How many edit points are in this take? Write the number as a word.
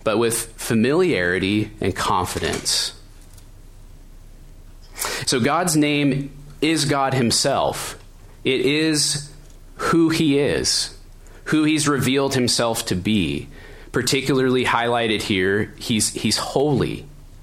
one